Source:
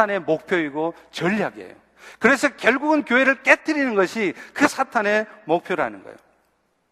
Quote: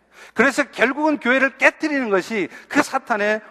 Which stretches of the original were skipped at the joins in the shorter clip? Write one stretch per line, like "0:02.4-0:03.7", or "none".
none